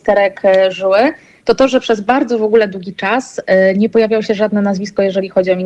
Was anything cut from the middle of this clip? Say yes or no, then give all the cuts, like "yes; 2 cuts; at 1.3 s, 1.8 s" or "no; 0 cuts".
no; 0 cuts